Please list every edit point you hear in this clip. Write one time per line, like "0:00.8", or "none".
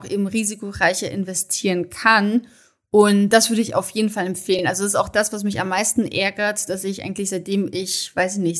none

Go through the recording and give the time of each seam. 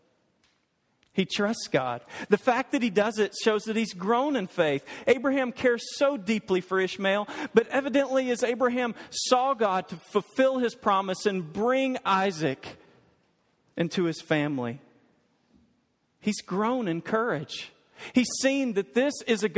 none

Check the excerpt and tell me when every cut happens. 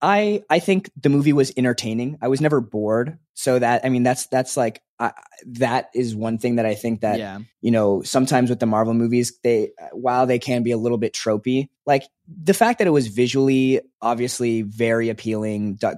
0:07.5

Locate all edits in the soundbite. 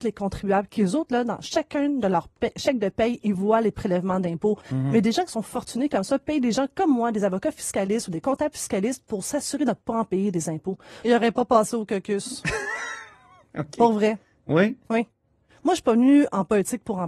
0:04.6
0:11.0

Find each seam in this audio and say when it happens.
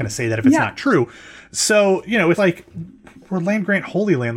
0:02.4

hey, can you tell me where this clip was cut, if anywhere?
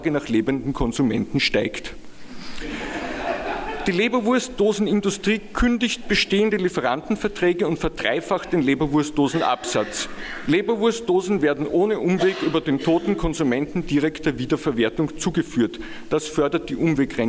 none

